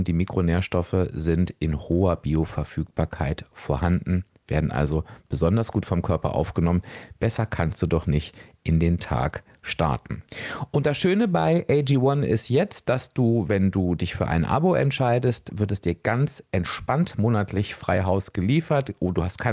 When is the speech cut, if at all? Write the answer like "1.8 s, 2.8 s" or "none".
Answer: none